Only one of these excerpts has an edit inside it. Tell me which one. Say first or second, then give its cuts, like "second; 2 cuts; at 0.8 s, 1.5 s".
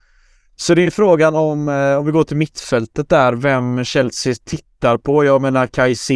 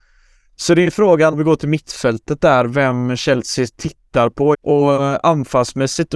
second; 2 cuts; at 1.3 s, 4.5 s